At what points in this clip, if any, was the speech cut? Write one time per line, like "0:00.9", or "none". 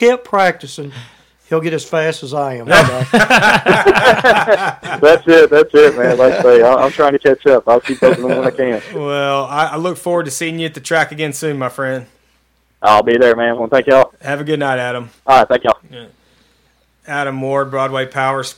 0:13.6
0:15.2

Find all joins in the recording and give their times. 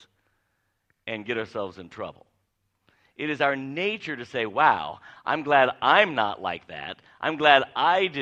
none

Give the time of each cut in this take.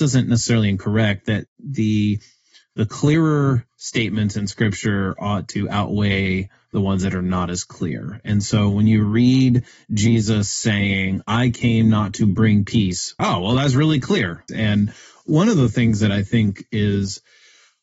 0:13.2
0:14.5

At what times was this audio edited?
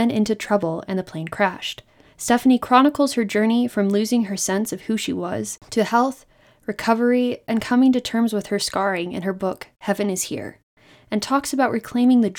0:02.0

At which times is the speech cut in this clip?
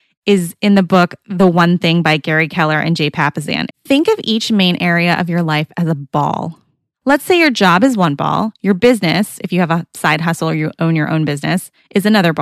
0:03.7

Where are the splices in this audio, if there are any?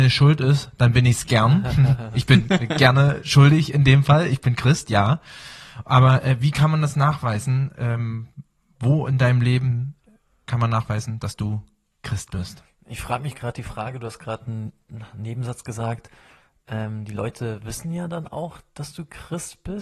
none

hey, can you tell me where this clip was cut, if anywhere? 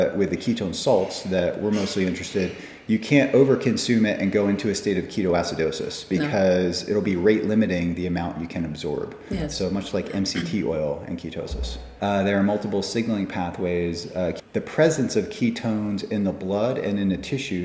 0:12.0
0:14.4

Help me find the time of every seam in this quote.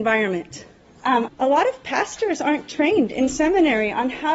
0:01.3

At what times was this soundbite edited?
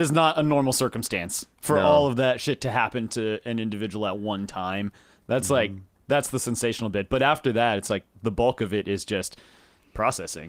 none

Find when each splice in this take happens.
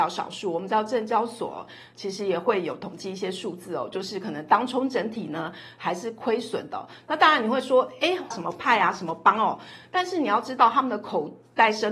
0:08.3

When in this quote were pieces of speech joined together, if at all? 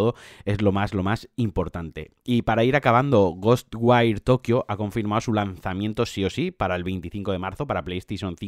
none

